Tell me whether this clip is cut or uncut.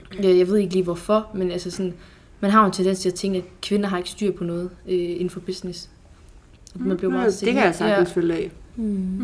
uncut